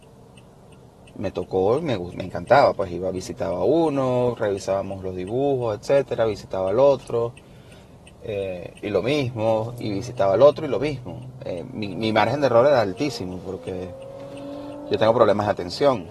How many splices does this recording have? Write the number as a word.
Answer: zero